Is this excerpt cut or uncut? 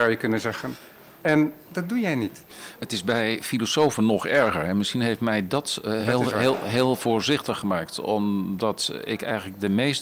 uncut